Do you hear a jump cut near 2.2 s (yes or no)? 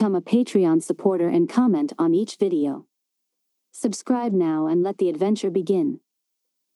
no